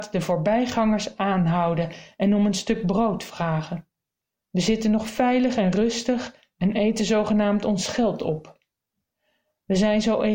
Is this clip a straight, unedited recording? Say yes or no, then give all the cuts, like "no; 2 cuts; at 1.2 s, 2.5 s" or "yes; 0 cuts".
no; 1 cut; at 4.3 s